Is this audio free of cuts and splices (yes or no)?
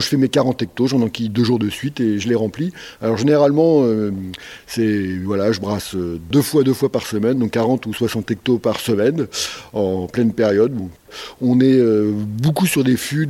yes